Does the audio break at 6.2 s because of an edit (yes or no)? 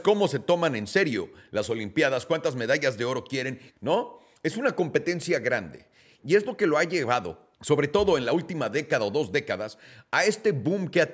yes